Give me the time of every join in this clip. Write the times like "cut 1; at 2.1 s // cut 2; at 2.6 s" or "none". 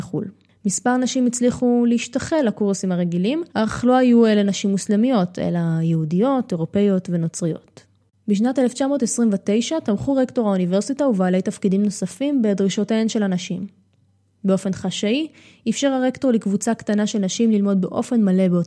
cut 1; at 3.5 s